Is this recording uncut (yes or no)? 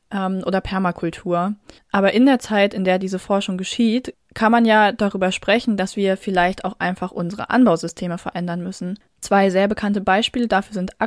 no